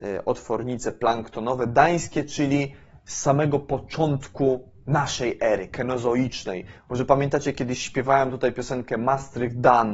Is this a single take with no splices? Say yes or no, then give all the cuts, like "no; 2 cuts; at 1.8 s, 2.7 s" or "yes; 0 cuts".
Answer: yes; 0 cuts